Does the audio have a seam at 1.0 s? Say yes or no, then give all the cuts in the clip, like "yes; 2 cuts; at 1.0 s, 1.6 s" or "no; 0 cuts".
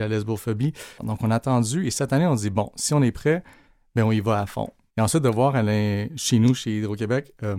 yes; 2 cuts; at 1.0 s, 4.9 s